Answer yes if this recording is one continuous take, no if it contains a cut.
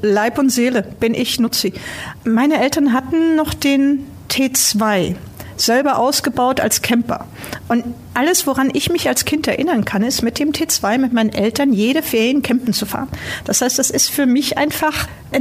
yes